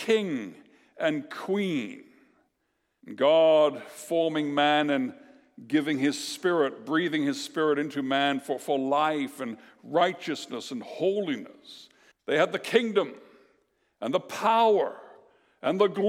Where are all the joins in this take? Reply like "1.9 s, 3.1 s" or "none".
3.0 s, 12.1 s